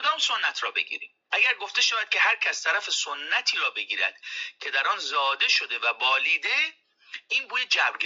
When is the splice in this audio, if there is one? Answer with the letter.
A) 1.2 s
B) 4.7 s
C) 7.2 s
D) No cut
A